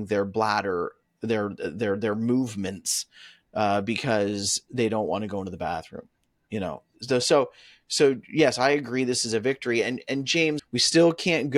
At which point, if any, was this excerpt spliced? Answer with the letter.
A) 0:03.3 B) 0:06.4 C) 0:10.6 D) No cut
C